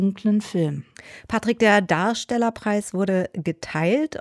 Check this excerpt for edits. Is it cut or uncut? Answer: uncut